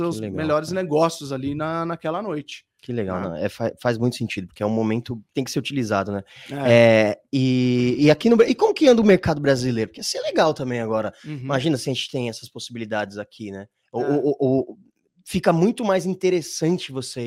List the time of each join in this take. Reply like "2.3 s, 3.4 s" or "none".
5.3 s